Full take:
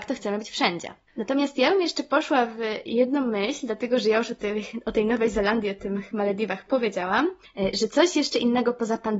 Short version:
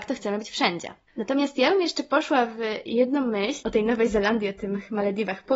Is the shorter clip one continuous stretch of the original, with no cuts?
no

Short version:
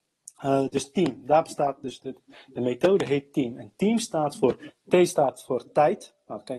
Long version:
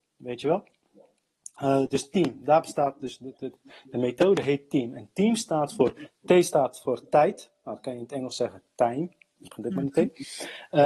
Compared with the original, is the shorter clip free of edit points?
no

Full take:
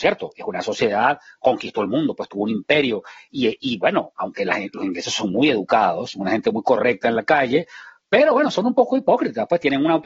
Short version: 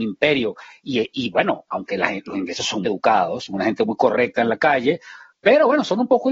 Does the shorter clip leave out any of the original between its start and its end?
yes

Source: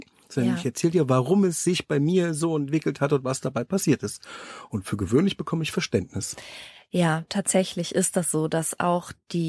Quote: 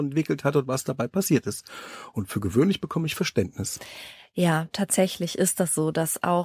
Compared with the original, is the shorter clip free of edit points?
yes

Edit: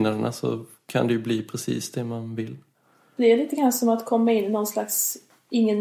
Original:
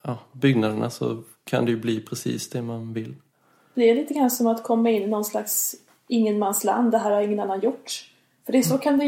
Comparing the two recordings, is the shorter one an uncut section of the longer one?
yes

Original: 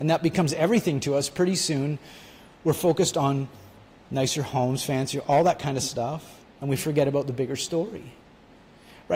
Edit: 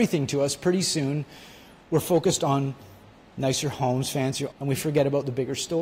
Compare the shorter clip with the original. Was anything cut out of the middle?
yes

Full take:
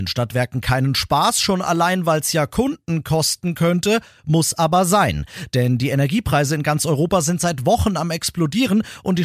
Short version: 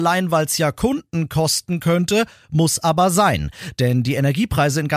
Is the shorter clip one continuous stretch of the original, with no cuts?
yes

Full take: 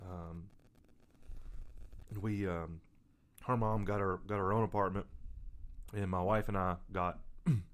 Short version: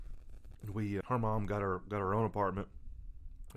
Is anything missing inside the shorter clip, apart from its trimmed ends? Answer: yes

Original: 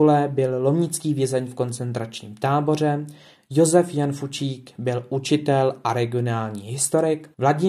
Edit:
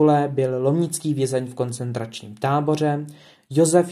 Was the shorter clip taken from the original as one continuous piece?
yes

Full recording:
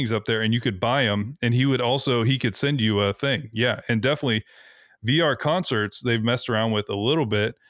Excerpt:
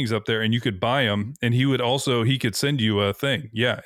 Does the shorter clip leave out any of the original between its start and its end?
no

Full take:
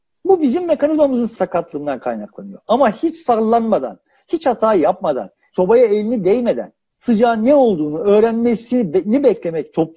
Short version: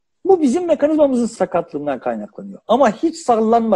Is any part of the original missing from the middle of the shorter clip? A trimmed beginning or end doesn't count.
no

